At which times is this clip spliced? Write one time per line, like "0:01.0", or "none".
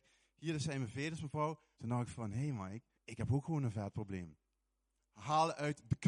0:01.7
0:02.9
0:05.0